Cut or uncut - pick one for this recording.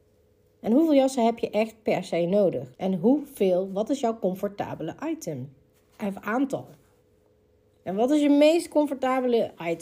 cut